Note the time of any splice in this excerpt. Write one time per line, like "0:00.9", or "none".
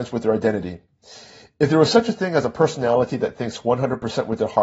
none